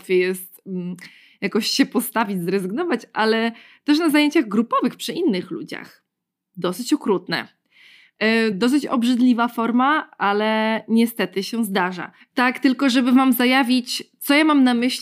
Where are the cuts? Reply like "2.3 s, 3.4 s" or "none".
8.5 s, 12.2 s